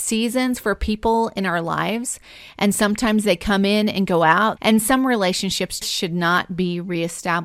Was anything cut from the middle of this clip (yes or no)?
yes